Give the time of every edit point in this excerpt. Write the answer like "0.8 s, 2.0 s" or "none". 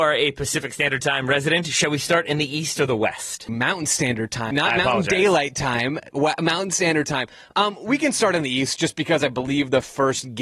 3.5 s, 4.5 s